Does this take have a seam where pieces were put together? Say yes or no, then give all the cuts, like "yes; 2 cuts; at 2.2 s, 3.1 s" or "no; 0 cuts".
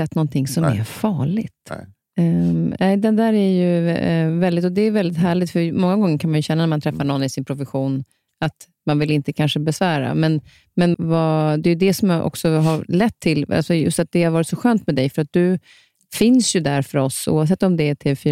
yes; 1 cut; at 10.9 s